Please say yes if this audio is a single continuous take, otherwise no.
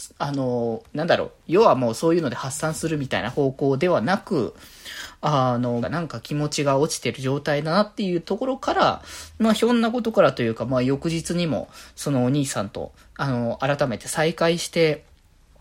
no